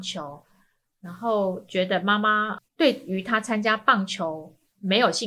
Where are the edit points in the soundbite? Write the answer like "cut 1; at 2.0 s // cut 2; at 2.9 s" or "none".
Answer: cut 1; at 2.7 s

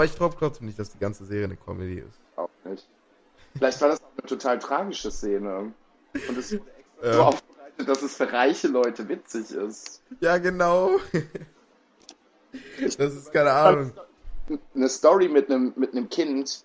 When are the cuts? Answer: cut 1; at 2.2 s

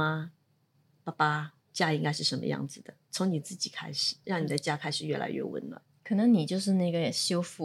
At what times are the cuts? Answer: cut 1; at 4.2 s

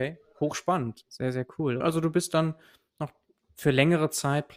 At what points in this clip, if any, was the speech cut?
cut 1; at 1.8 s

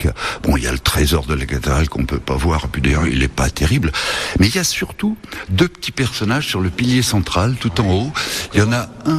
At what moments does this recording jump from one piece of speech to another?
none

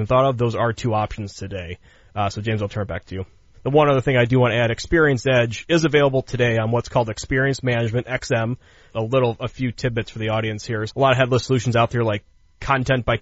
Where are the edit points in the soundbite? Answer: cut 1; at 3.5 s // cut 2; at 8.9 s // cut 3; at 10.9 s

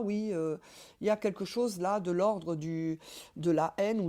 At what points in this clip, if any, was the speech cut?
none

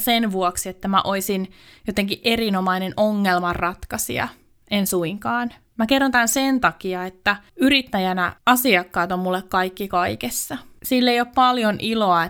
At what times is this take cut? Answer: cut 1; at 5.7 s

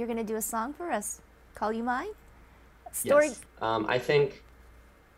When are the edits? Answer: cut 1; at 3.5 s

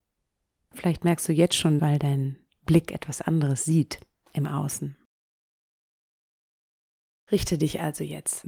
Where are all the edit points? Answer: cut 1; at 1.8 s

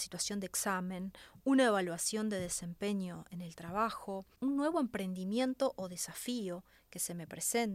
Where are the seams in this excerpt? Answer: cut 1; at 1.4 s // cut 2; at 4.3 s

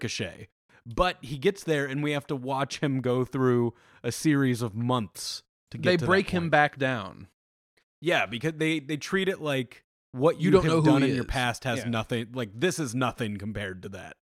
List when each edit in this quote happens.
none

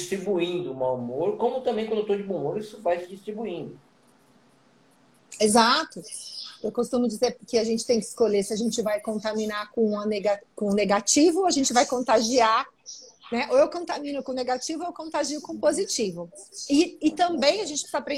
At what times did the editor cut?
none

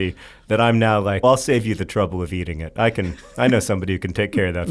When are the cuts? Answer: cut 1; at 1.2 s

